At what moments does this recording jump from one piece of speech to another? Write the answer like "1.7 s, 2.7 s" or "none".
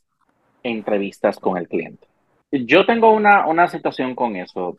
2.4 s